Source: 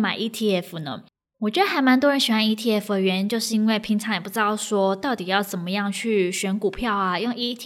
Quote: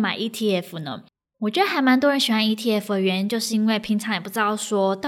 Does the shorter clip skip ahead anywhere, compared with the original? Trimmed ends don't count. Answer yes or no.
no